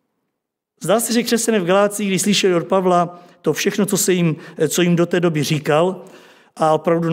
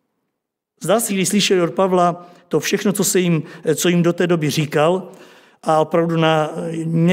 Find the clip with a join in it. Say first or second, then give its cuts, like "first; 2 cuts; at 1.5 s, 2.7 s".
second; 1 cut; at 1.1 s